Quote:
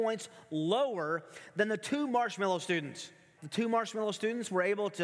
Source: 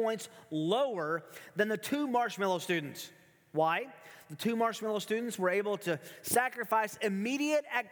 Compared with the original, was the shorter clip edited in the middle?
yes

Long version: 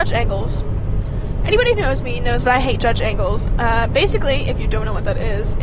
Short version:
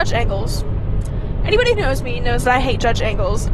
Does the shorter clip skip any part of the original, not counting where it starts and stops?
no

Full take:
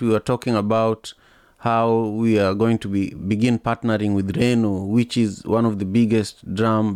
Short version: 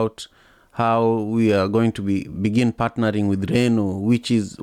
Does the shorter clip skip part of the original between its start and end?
no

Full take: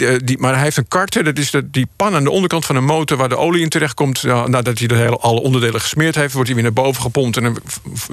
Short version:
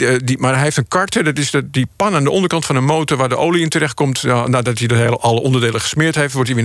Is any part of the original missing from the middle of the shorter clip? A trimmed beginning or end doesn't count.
no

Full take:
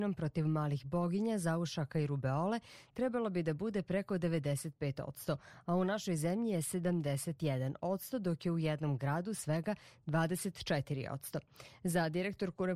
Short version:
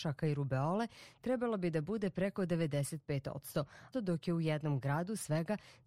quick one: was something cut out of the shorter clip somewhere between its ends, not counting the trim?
yes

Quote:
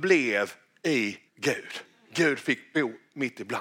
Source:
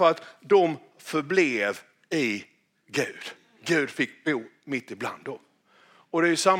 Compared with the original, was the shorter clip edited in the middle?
yes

